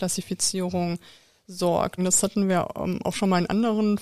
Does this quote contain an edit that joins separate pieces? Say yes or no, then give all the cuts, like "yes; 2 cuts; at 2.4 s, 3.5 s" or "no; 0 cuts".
yes; 1 cut; at 2.0 s